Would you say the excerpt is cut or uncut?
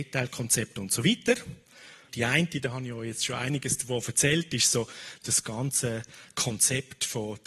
cut